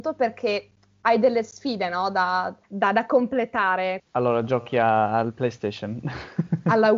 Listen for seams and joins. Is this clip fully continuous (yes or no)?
no